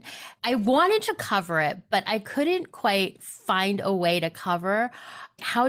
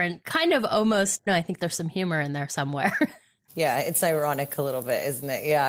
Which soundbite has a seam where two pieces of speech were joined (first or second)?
second